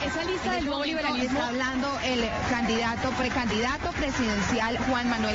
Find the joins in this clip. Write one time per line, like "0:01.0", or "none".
none